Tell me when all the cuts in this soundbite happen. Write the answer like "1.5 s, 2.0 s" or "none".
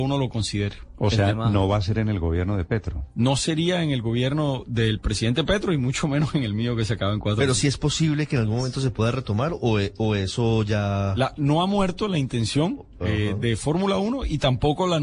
none

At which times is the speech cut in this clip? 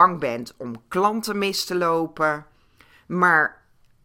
none

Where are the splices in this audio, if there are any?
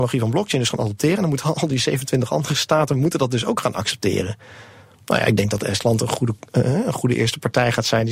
none

